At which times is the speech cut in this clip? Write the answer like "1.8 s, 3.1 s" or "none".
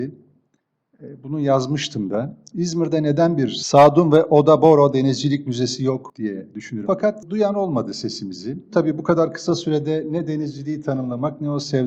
6.9 s, 8.7 s